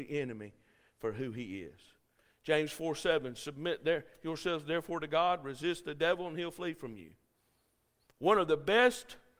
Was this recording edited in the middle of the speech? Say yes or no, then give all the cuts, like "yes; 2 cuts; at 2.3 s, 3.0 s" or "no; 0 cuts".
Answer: no; 0 cuts